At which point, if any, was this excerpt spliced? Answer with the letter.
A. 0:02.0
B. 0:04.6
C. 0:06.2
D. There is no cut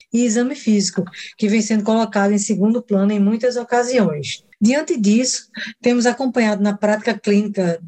D